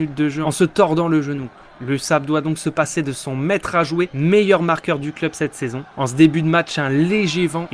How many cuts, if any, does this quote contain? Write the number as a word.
zero